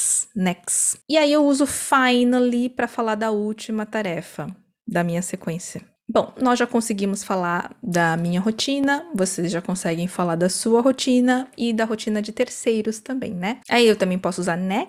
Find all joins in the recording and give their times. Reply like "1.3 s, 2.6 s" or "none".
6.4 s, 13.6 s